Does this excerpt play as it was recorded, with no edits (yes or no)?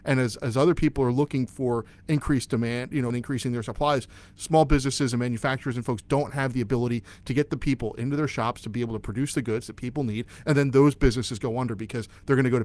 no